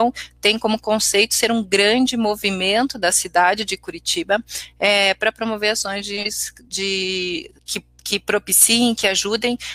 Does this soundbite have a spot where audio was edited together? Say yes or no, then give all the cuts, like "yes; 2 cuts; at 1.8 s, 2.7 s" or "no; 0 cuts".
yes; 1 cut; at 7.6 s